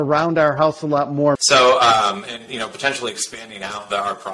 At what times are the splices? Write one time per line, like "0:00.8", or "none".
0:01.4